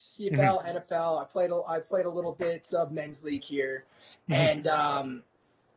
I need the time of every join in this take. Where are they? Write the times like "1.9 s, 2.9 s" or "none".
none